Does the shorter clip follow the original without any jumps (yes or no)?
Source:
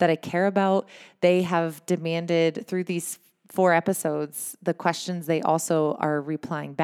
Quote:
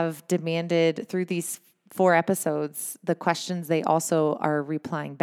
yes